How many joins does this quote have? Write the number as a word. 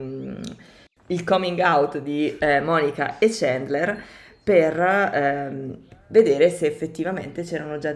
zero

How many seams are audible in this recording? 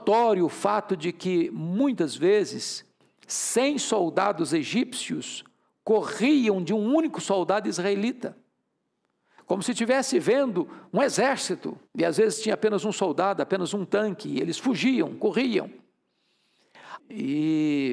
two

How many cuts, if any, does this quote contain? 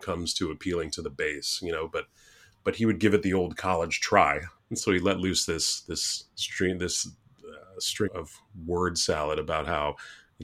two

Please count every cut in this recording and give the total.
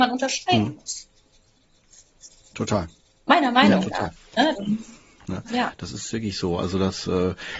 one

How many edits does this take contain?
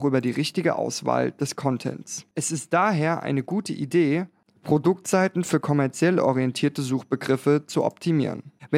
zero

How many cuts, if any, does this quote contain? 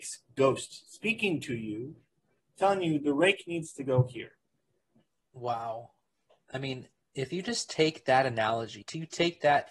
one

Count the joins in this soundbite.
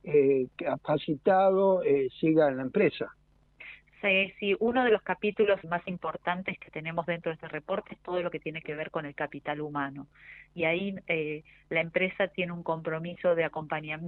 one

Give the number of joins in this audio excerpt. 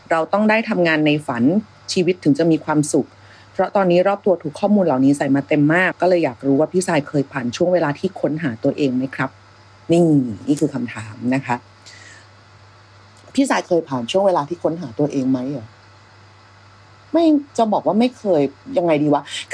two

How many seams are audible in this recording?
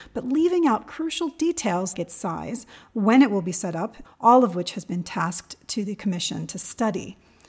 two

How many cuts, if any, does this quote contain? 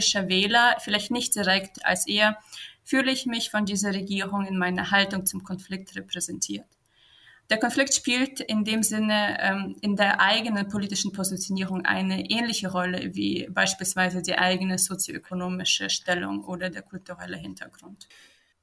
one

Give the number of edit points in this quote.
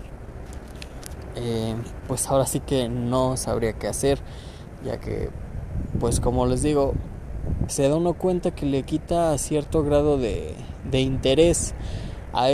one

